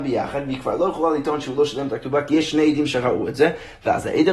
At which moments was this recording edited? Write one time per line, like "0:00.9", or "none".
none